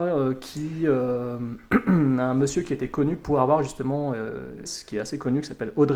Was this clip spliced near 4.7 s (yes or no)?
yes